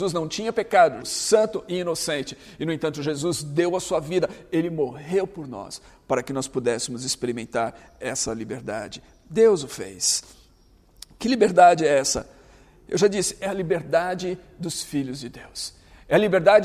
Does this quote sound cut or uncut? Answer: cut